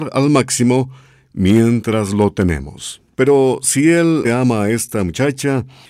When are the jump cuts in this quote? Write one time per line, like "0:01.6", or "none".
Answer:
0:03.1
0:04.2

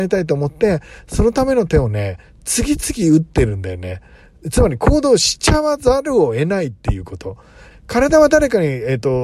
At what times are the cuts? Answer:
0:07.7

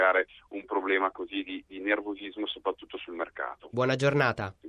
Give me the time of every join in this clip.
0:03.7

